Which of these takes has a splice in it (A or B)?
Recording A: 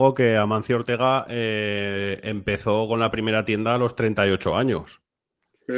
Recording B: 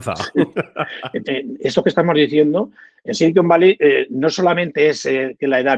B